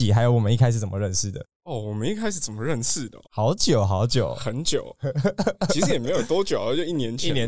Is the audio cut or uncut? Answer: cut